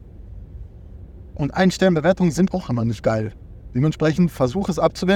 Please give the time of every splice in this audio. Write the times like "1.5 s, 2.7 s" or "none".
2.5 s